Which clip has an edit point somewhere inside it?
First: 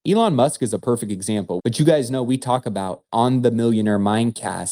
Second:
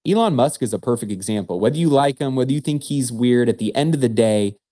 first; 2 cuts; at 1.6 s, 3.1 s

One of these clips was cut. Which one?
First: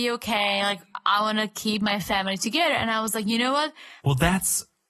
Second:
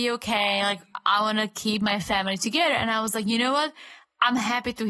first; 1 cut; at 4.0 s

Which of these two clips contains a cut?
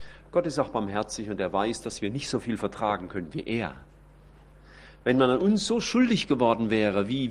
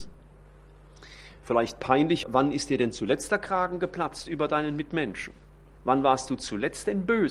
second; 1 cut; at 2.2 s

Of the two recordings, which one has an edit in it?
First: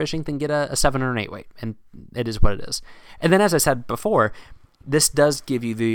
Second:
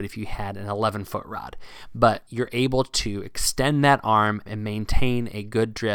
second; 2 cuts; at 2.3 s, 4.5 s

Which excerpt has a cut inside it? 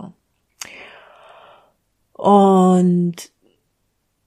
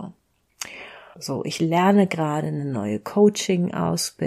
second; 1 cut; at 1.1 s

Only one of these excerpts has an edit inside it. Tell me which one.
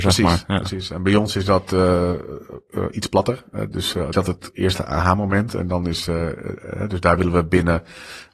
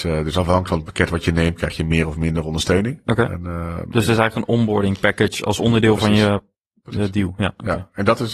first; 1 cut; at 4.1 s

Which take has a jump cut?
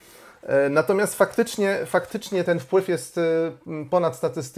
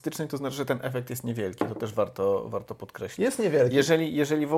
first; 1 cut; at 2.4 s

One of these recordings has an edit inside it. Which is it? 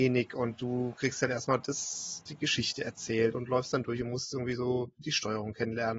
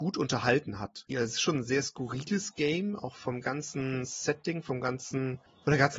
second; 1 cut; at 1.1 s

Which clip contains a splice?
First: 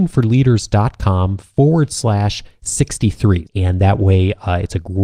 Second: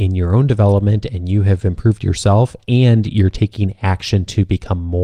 first; 1 cut; at 3.4 s

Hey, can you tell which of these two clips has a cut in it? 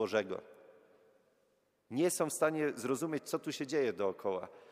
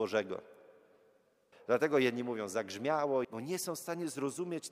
second; 2 cuts; at 1.5 s, 3.2 s

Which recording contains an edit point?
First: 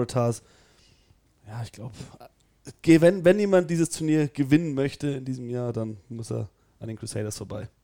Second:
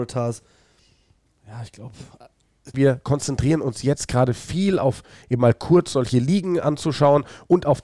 second; 1 cut; at 2.7 s

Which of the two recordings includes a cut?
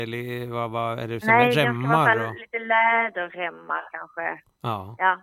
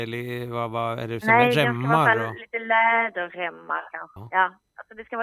second; 1 cut; at 4.2 s

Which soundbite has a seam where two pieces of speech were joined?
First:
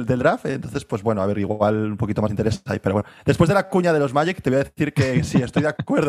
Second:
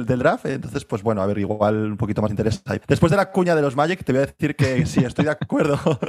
second; 1 cut; at 2.8 s

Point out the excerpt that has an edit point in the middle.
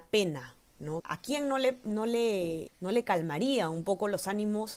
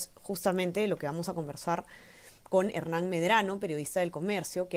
first; 2 cuts; at 1.0 s, 2.7 s

